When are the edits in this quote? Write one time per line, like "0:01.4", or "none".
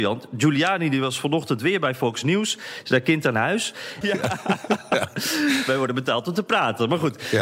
0:04.0